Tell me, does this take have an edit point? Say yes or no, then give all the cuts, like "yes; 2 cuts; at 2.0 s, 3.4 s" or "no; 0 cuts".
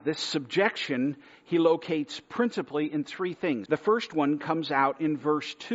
yes; 1 cut; at 3.7 s